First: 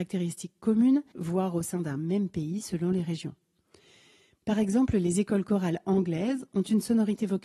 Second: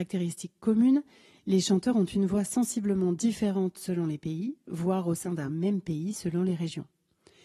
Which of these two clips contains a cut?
first; 1 cut; at 1.1 s

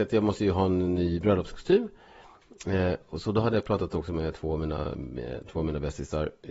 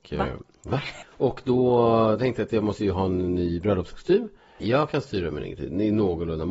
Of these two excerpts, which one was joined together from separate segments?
second; 2 cuts; at 1.0 s, 4.6 s

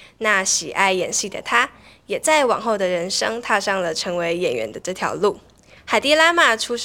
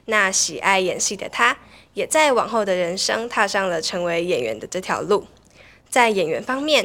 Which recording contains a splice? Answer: first; 1 cut; at 5.8 s

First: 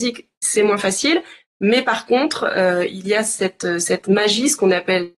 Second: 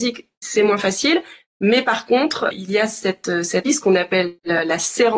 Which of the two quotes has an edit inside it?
second; 2 cuts; at 2.5 s, 3.7 s

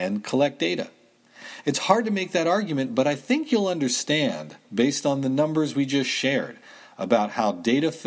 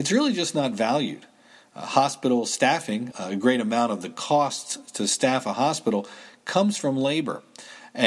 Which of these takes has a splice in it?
second; 1 cut; at 3.1 s

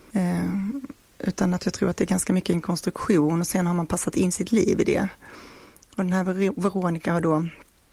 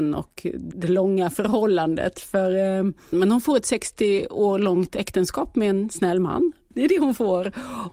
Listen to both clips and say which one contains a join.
second; 1 cut; at 3.1 s

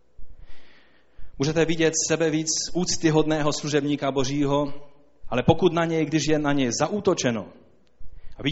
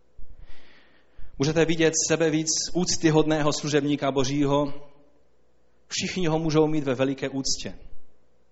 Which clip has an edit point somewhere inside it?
first; 1 cut; at 5.2 s

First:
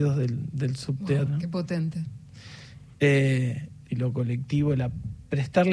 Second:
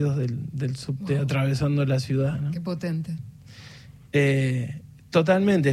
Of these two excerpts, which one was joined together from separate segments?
first; 2 cuts; at 1.2 s, 3.9 s

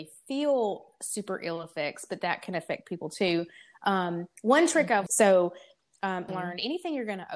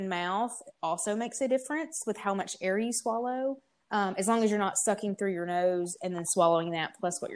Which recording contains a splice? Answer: first; 2 cuts; at 5.1 s, 6.3 s

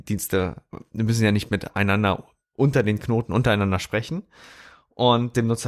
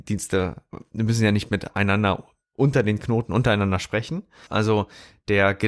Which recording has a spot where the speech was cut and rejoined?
second; 1 cut; at 4.5 s

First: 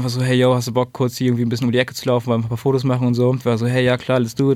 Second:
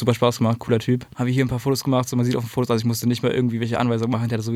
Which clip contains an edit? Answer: second; 1 cut; at 1.1 s

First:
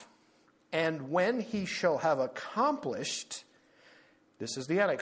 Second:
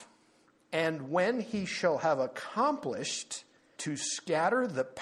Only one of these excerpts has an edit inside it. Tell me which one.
second; 1 cut; at 3.8 s

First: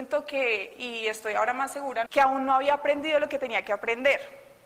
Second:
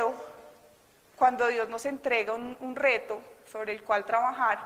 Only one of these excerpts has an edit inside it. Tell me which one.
first; 1 cut; at 2.1 s

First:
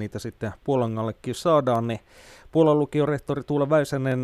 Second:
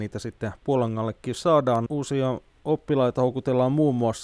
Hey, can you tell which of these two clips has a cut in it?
second; 1 cut; at 1.9 s

